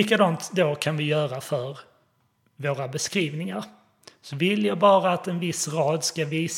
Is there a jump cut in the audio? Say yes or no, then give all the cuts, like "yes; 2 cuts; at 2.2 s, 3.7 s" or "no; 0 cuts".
no; 0 cuts